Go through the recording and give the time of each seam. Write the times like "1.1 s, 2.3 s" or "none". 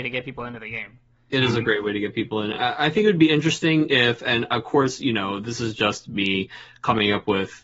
none